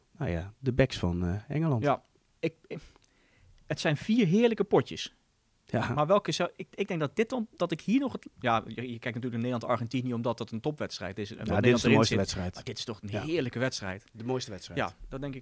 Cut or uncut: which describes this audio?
uncut